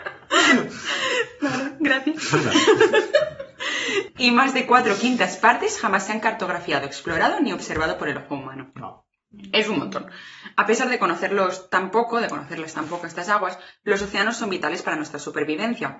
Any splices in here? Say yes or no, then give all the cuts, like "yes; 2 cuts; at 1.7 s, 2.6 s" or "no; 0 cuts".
no; 0 cuts